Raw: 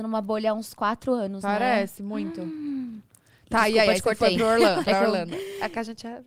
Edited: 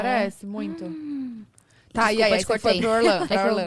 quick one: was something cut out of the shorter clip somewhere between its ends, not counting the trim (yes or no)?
no